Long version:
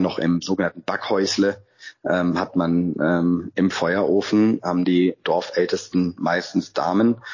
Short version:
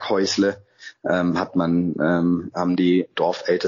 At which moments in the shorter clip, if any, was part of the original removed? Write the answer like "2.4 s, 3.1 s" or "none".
2.5 s